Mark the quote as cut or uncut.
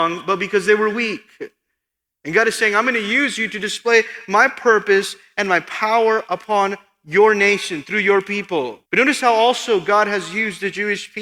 cut